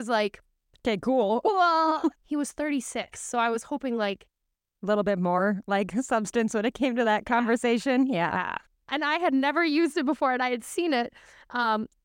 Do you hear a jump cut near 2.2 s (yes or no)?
yes